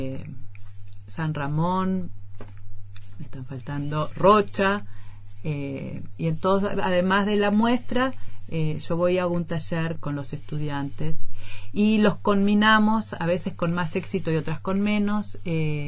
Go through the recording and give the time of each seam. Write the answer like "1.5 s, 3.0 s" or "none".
10.0 s